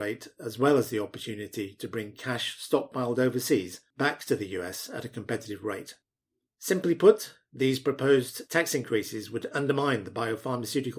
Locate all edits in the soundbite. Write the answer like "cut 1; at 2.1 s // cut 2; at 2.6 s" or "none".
cut 1; at 6.5 s